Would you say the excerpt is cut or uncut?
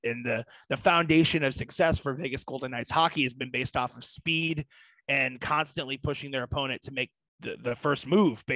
uncut